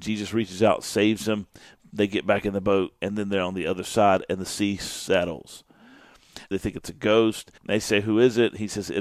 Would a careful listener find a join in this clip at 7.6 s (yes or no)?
yes